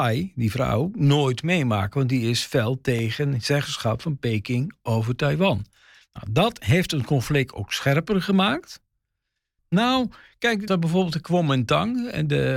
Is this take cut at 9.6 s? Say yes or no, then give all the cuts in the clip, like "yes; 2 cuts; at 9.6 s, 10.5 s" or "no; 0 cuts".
yes; 2 cuts; at 9.6 s, 10.7 s